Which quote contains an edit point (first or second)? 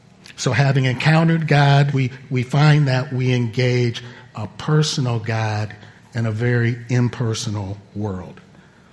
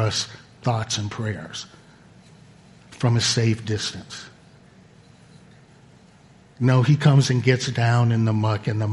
first